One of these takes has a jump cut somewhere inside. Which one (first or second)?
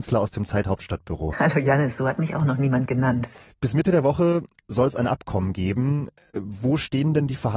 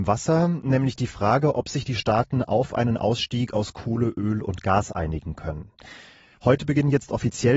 first